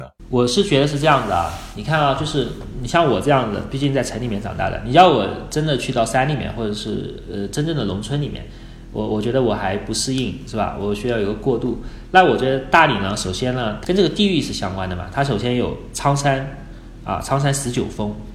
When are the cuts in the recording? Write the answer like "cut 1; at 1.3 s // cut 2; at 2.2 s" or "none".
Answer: none

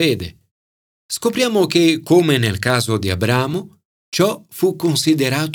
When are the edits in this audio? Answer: none

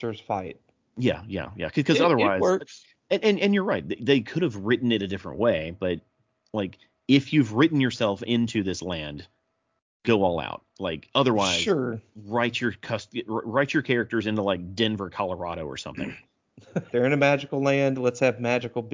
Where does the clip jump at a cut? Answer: cut 1; at 16.9 s

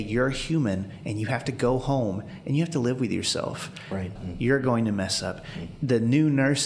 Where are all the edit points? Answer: cut 1; at 4.2 s

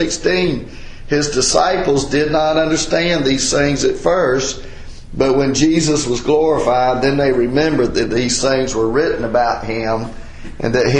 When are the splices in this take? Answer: none

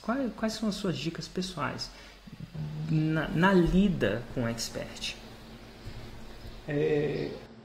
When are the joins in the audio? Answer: none

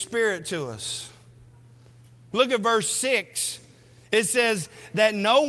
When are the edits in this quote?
cut 1; at 2.3 s

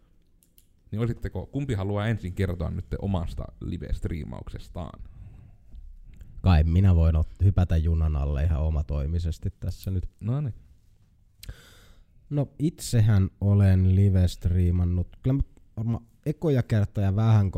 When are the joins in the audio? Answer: none

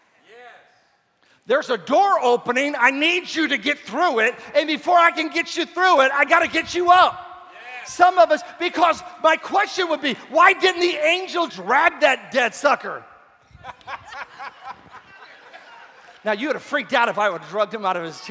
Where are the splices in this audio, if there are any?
cut 1; at 11.5 s

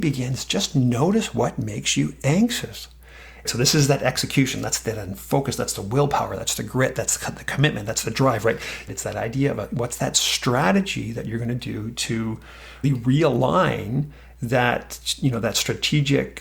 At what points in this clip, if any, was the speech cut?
cut 1; at 3.4 s // cut 2; at 8.9 s // cut 3; at 12.8 s

